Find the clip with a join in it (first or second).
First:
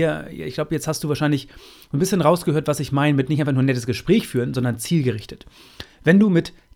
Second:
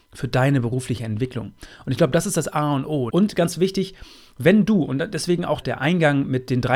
second